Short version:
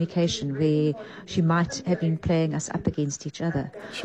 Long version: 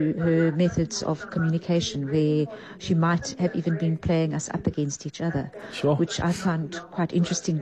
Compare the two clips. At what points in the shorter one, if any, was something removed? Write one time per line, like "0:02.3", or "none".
0:02.0